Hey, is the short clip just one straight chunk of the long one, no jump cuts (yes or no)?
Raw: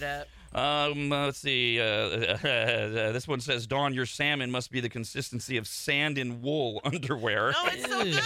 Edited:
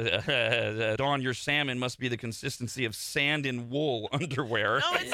no